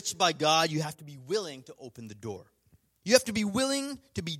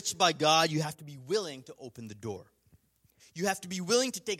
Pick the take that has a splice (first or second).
first